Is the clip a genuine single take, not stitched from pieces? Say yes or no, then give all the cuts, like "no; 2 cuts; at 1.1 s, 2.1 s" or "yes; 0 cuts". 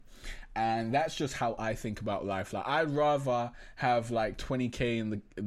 yes; 0 cuts